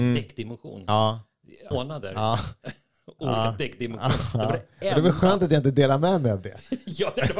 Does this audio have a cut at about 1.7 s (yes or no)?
yes